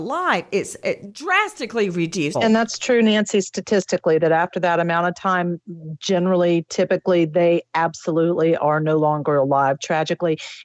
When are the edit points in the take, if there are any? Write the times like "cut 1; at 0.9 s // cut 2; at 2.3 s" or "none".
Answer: cut 1; at 2.3 s

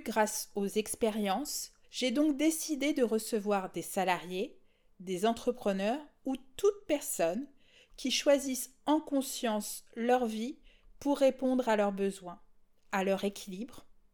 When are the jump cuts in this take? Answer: cut 1; at 1.8 s

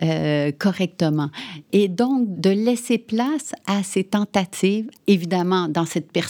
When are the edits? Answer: cut 1; at 2.4 s // cut 2; at 5.0 s

